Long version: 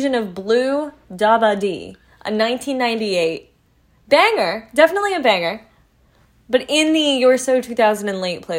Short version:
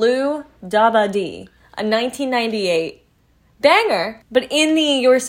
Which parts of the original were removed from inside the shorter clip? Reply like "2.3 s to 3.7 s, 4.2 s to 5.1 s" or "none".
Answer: 4.7 s to 6.4 s

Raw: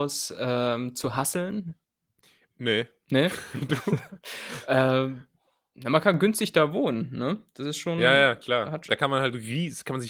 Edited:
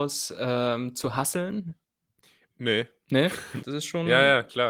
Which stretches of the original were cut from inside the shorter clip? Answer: 3.6 s to 7.5 s

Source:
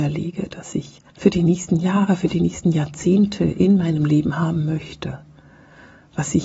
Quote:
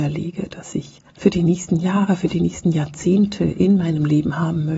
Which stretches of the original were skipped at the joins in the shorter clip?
none

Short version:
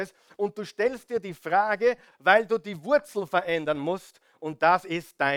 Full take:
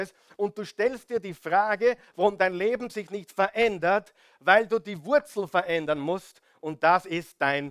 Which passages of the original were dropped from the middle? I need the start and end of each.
2.1 s to 4.3 s

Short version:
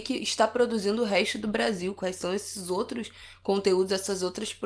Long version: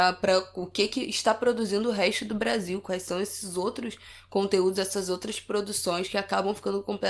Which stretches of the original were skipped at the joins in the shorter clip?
none

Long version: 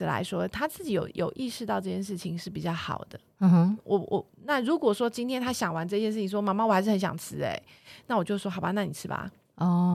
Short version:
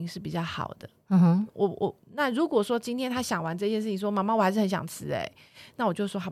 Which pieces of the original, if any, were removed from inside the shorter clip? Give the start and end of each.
none

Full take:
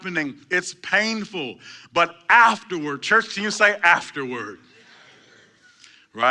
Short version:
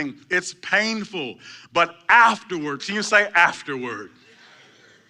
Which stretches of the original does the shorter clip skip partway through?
3.0 s to 3.3 s

